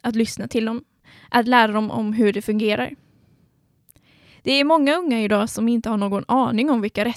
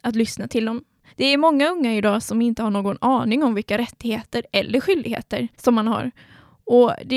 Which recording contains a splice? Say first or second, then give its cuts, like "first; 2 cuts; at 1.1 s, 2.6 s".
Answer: second; 2 cuts; at 1.1 s, 5.5 s